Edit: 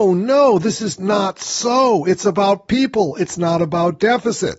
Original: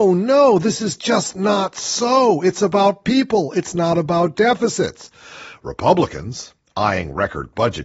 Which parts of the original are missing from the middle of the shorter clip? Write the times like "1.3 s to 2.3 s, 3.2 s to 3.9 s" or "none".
1.0 s to 1.3 s